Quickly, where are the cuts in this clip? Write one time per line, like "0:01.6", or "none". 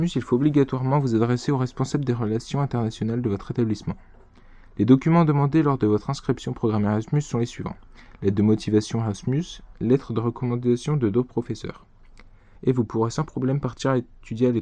0:09.7
0:12.6